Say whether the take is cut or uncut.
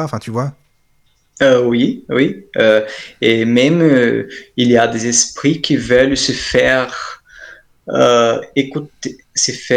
uncut